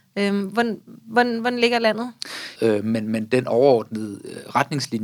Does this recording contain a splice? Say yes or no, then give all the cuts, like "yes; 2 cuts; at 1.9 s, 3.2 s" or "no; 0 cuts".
yes; 1 cut; at 2.6 s